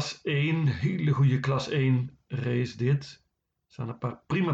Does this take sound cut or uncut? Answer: uncut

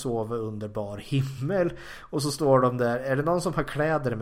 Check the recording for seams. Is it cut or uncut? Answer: uncut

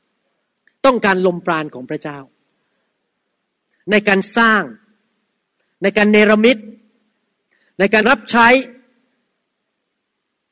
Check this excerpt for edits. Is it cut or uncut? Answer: cut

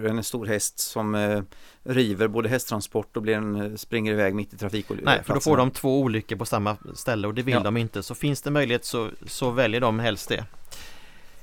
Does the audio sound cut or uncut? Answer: uncut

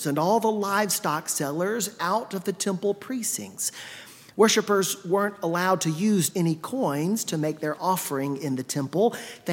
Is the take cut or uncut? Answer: cut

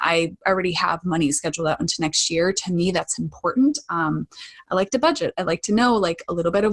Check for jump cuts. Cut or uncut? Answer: uncut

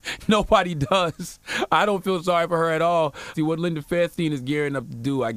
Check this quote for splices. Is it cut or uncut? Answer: cut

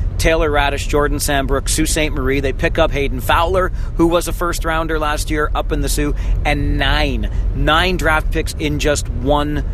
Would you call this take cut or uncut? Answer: uncut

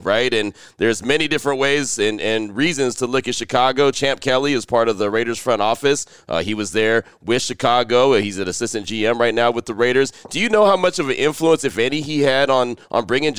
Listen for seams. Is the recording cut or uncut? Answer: uncut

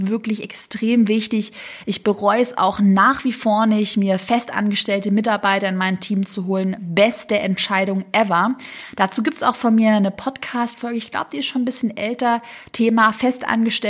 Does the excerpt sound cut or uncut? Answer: uncut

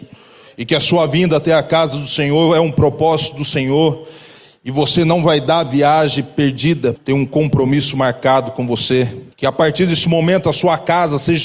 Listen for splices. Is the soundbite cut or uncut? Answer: cut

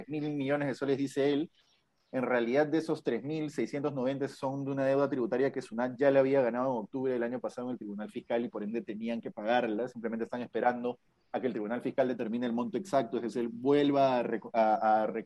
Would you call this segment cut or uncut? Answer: uncut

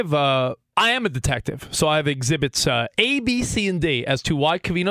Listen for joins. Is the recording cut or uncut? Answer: uncut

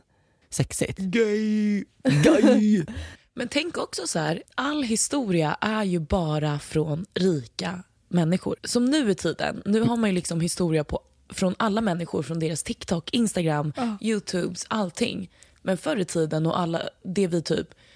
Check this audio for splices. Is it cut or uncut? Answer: uncut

